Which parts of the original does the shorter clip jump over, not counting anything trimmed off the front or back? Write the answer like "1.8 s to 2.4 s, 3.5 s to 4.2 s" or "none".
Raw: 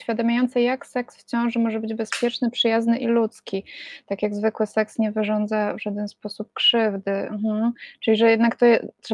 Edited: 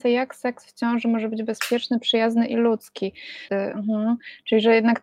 4.0 s to 7.0 s